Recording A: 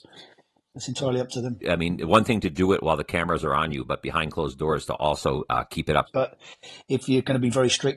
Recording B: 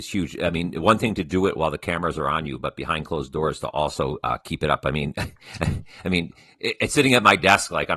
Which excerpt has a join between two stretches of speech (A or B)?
A